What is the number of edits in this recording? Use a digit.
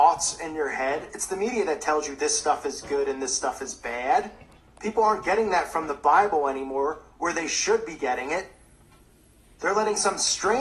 0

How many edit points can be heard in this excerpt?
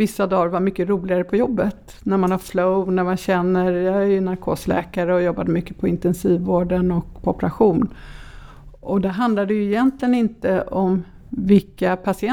0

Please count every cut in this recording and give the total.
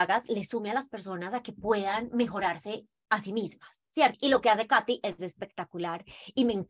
1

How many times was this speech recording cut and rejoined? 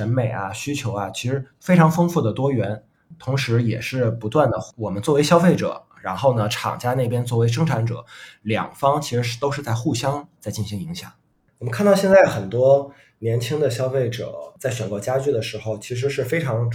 0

